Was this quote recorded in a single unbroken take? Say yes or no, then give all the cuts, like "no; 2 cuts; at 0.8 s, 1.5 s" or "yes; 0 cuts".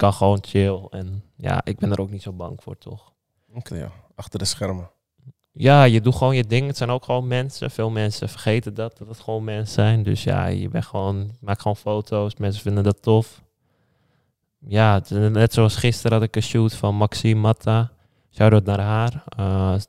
no; 1 cut; at 3.7 s